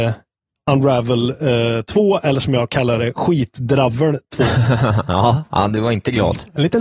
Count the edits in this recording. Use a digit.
0